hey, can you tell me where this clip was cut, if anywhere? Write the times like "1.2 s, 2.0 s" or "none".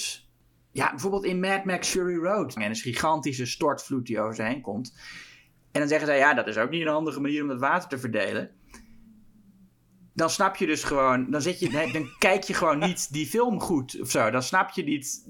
2.6 s